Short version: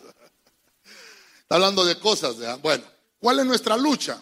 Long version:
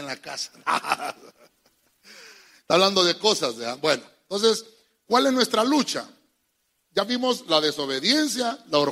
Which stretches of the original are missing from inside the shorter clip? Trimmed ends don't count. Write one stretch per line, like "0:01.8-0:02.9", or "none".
0:04.2-0:04.9